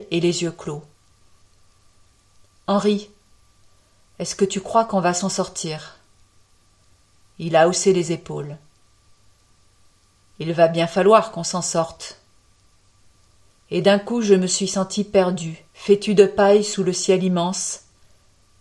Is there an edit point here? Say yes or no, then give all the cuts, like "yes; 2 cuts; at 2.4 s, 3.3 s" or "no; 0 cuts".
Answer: yes; 2 cuts; at 13.6 s, 15.7 s